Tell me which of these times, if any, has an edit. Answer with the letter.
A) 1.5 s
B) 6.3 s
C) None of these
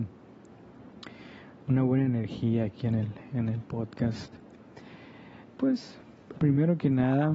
B